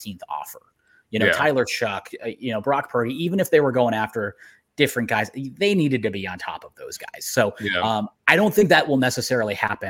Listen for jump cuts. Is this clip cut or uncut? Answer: uncut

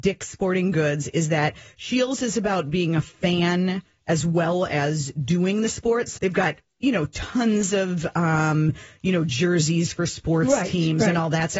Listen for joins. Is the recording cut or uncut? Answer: cut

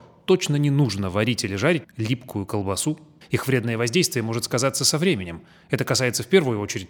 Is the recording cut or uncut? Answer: cut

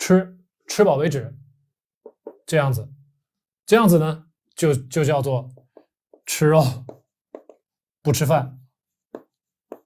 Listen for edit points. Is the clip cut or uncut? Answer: uncut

